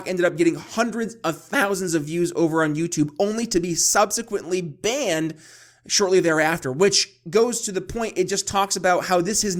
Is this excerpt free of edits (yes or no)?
yes